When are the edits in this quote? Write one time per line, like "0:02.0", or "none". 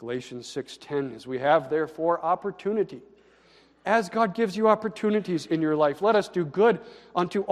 none